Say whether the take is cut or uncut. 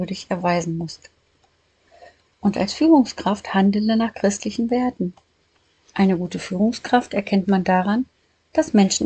uncut